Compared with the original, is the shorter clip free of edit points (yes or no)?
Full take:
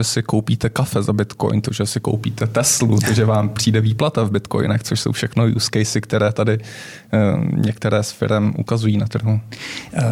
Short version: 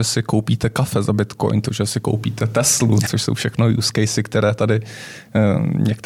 no